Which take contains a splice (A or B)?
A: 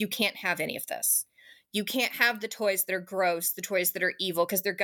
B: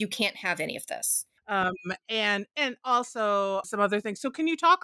B